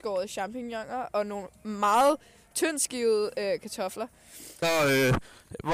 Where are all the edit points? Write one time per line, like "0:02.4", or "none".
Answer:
0:04.6